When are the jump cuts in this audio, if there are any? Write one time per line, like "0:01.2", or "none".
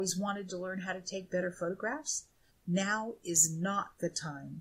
0:02.5